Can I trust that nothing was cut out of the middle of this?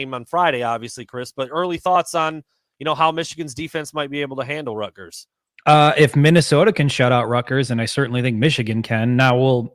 yes; 0 cuts

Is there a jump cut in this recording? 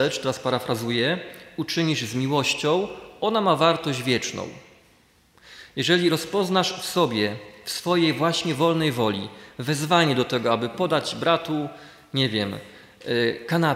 no; 0 cuts

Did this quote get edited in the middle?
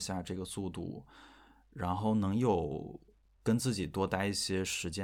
no; 0 cuts

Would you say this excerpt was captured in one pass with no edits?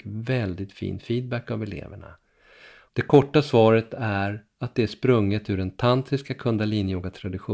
no; 1 cut; at 2.9 s

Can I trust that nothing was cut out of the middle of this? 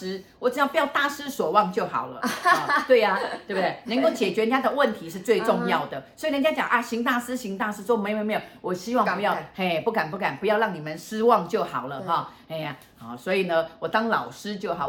yes; 0 cuts

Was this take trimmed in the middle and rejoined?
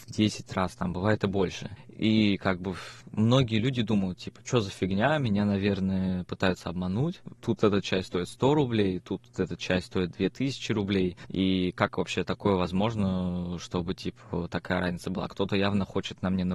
no; 0 cuts

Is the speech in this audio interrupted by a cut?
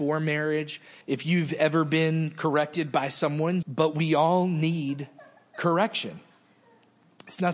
yes; 2 cuts; at 1.0 s, 3.6 s

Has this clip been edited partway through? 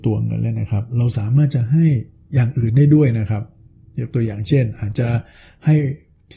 no; 0 cuts

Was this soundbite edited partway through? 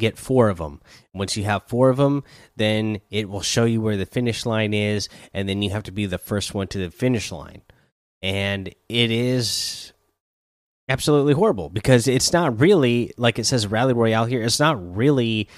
no; 0 cuts

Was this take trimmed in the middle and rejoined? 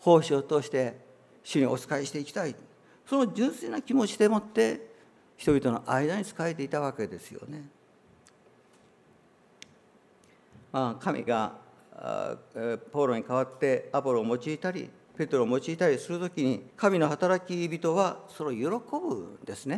yes; 2 cuts; at 11.3 s, 16.7 s

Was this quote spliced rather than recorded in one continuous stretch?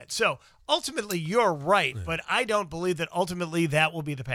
no; 0 cuts

